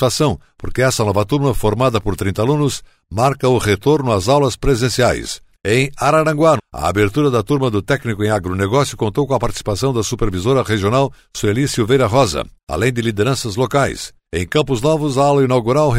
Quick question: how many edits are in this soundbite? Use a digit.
3